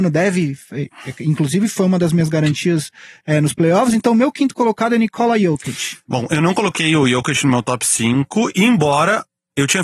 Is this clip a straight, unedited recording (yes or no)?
yes